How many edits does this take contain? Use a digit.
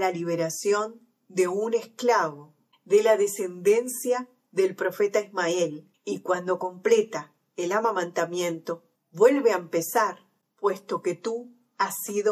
2